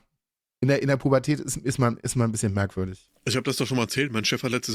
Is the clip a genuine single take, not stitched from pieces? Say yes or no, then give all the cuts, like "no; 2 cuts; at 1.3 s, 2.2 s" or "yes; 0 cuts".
yes; 0 cuts